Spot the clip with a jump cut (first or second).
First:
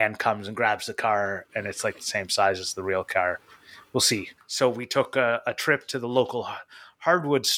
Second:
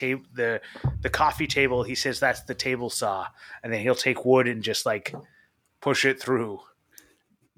first